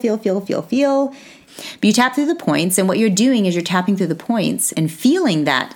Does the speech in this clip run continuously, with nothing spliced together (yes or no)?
no